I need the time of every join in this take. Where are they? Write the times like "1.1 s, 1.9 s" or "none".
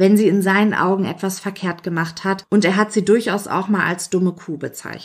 none